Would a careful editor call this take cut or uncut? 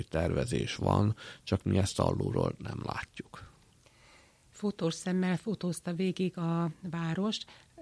uncut